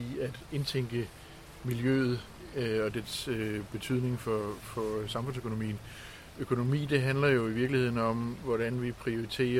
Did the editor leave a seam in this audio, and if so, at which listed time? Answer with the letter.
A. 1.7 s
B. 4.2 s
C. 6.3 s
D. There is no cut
D